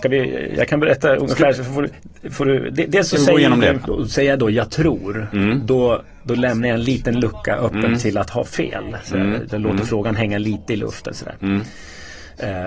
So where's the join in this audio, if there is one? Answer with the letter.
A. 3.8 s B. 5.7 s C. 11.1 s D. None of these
A